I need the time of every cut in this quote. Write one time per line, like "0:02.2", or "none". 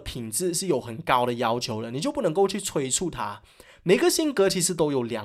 none